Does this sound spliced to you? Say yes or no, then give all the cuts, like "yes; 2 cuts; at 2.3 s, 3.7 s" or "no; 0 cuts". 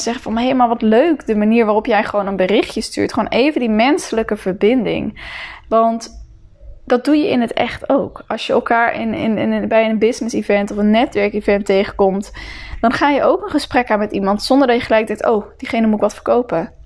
no; 0 cuts